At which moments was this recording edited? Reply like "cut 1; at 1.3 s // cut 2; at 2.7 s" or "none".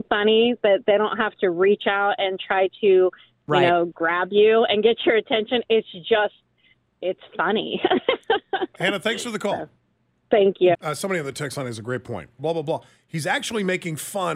cut 1; at 10.7 s // cut 2; at 12.4 s